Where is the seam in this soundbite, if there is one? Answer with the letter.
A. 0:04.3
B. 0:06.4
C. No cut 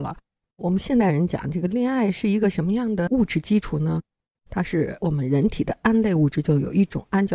C